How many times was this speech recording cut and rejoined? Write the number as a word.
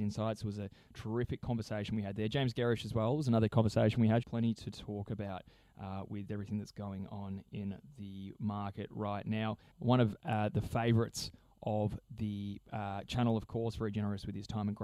two